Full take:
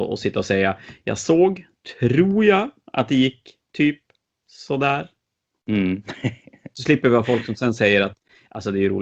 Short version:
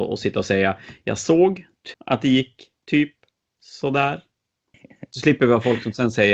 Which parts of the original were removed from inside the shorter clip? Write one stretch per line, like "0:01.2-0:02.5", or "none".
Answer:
0:01.9-0:02.8
0:05.6-0:06.4